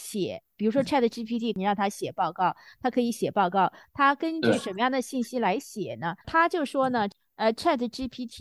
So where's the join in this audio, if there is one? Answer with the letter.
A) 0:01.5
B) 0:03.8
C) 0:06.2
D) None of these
C